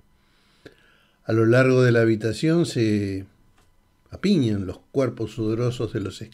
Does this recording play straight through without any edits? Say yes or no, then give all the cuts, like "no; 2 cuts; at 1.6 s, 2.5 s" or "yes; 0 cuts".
yes; 0 cuts